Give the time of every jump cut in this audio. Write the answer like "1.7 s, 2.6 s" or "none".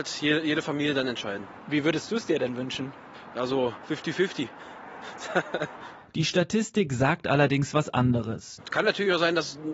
8.6 s